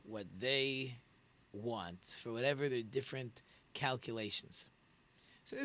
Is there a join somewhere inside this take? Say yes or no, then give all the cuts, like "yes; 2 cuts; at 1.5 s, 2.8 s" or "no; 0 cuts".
no; 0 cuts